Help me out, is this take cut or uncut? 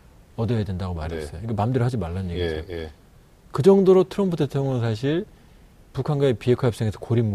uncut